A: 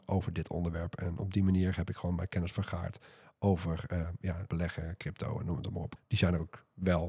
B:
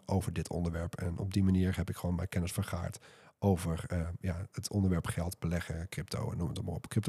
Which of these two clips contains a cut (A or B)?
A